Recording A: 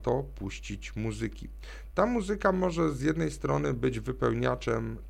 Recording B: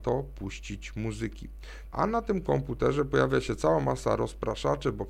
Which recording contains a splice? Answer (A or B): B